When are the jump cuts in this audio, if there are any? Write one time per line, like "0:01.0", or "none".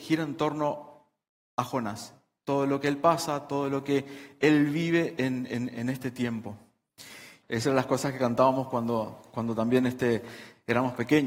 0:07.4